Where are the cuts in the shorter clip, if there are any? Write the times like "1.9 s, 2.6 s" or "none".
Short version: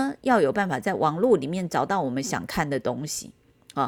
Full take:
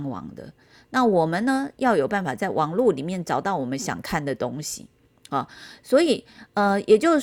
none